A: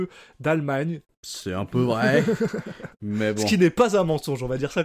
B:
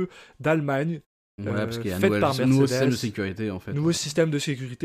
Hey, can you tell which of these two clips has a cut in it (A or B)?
A